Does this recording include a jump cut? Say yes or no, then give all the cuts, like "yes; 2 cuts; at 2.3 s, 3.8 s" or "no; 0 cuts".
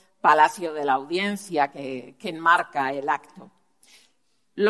no; 0 cuts